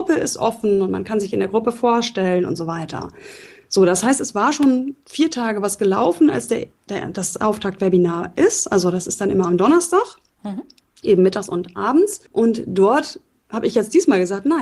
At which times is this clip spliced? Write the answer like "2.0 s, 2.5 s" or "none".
12.3 s